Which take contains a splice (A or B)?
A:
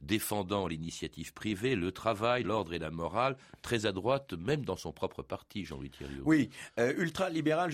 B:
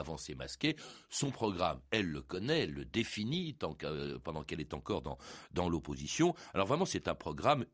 A